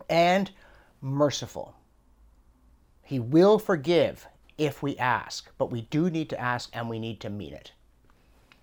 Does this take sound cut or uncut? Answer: uncut